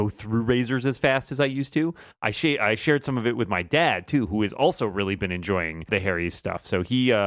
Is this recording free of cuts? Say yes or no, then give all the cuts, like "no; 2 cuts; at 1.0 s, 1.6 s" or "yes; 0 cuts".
yes; 0 cuts